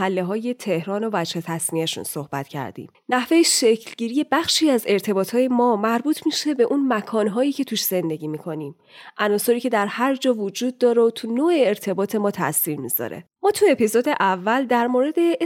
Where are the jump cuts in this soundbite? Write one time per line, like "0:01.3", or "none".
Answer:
0:13.4